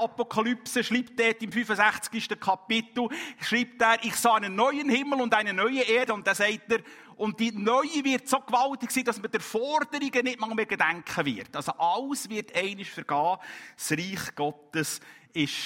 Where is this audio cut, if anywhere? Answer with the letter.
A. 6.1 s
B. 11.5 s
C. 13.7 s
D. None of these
A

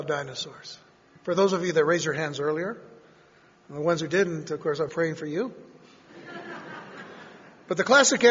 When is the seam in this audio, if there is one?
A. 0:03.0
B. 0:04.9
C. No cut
B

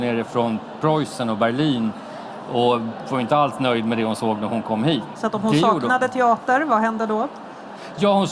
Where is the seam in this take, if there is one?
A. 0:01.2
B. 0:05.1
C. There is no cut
B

